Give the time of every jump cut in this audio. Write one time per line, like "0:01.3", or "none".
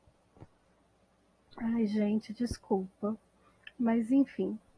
none